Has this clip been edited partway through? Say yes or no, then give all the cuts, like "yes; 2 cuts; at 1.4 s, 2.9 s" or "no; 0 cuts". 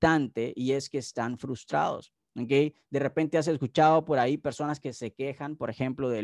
no; 0 cuts